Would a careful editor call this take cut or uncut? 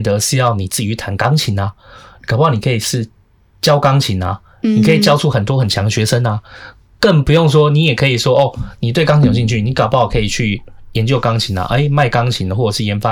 uncut